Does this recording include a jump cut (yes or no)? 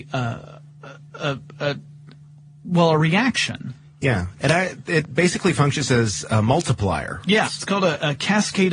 yes